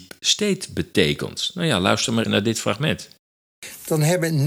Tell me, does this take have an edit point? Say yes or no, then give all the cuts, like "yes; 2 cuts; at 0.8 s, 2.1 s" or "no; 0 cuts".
yes; 1 cut; at 2.2 s